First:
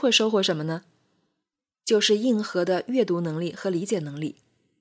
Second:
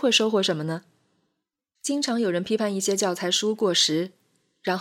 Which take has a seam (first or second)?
second